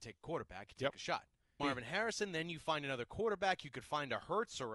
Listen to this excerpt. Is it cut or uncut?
cut